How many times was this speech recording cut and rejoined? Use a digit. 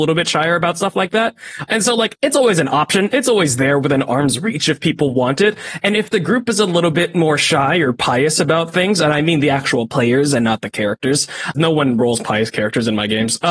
2